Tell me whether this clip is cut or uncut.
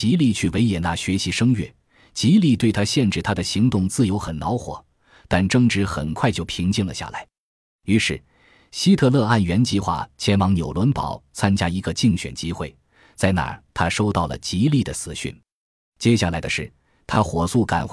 uncut